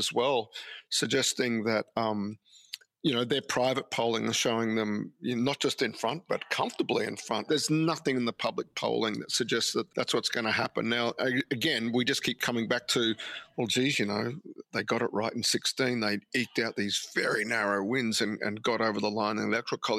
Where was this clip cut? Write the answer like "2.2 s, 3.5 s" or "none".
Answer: 7.5 s, 9.9 s